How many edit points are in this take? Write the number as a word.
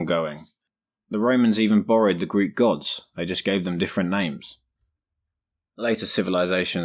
one